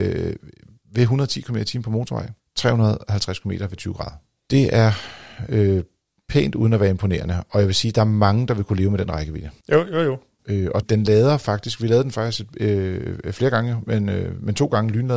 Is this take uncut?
no; 2 cuts; at 9.6 s, 10.8 s

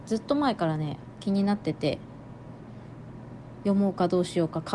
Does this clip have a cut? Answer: no; 0 cuts

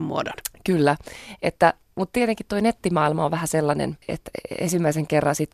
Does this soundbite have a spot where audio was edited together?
no; 0 cuts

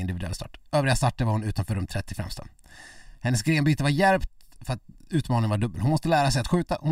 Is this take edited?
no; 0 cuts

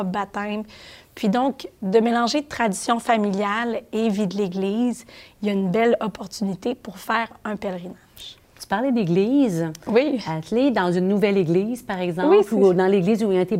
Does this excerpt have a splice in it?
no; 0 cuts

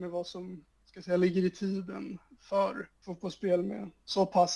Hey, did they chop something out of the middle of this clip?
yes; 1 cut; at 3.0 s

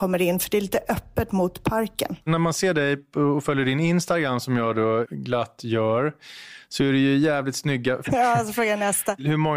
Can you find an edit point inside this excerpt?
yes; 3 cuts; at 2.2 s, 5.0 s, 8.0 s

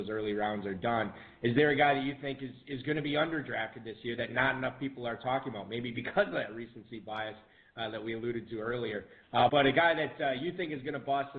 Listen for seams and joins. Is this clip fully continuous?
no; 1 cut; at 9.5 s

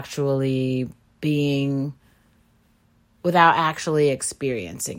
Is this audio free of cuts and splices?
no; 1 cut; at 1.2 s

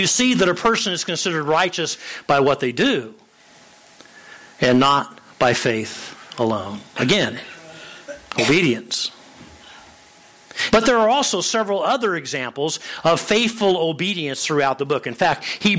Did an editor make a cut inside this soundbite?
yes; 1 cut; at 10.7 s

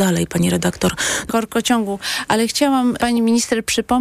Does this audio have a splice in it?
yes; 2 cuts; at 1.3 s, 3.0 s

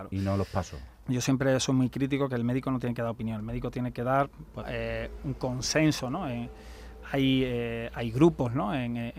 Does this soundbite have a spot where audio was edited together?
yes; 2 cuts; at 1.0 s, 4.6 s

